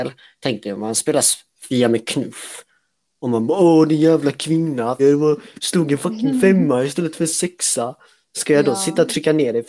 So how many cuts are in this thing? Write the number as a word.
one